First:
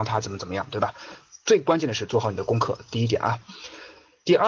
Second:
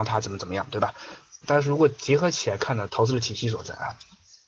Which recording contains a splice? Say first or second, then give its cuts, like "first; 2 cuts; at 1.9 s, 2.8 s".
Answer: second; 2 cuts; at 1.4 s, 2.9 s